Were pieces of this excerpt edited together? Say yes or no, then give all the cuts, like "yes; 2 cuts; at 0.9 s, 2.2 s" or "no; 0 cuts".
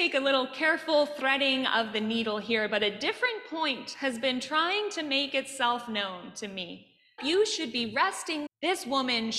yes; 2 cuts; at 7.2 s, 8.5 s